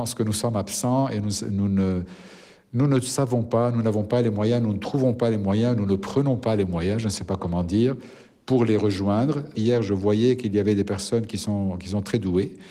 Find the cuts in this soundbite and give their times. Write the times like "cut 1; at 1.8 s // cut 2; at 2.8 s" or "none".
cut 1; at 9.5 s